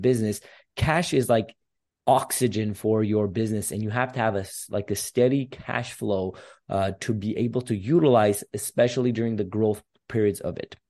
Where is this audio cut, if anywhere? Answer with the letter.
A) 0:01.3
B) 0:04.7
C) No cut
C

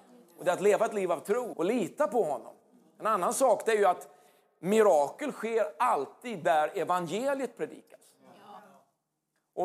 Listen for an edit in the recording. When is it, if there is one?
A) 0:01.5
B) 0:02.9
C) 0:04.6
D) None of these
A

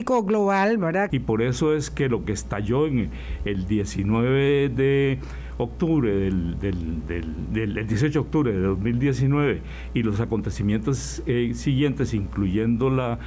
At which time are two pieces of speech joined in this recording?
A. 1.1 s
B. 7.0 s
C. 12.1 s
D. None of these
A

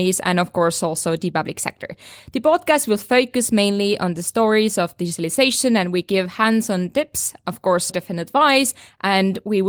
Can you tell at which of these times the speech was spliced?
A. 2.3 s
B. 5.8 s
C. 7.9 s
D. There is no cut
C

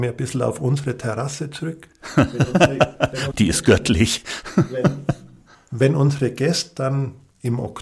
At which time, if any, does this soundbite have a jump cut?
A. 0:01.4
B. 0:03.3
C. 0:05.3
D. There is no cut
B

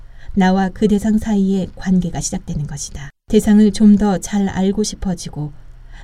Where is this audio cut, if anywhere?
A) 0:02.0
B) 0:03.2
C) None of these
B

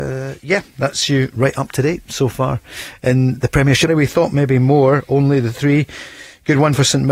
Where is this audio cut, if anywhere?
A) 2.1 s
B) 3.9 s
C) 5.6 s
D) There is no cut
B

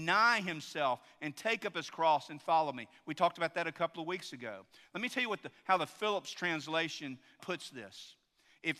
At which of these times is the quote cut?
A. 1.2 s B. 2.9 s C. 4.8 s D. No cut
D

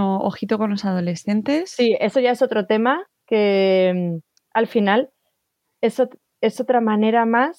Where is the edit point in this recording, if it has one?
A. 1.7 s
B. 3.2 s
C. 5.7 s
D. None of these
D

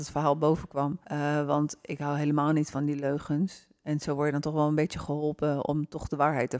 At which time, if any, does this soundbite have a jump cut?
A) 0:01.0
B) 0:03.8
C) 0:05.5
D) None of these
A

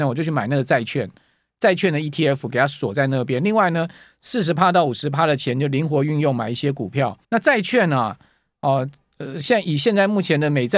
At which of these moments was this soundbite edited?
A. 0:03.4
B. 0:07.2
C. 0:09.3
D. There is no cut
B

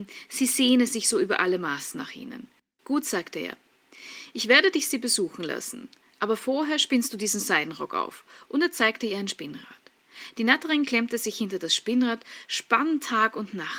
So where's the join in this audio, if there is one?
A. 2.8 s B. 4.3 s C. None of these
A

